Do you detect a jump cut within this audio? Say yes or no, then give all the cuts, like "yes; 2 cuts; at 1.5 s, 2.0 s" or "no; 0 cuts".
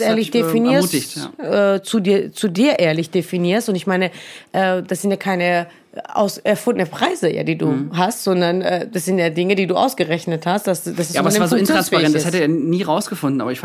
no; 0 cuts